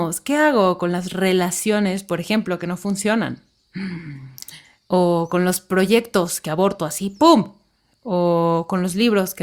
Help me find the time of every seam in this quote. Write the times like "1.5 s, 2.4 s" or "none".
none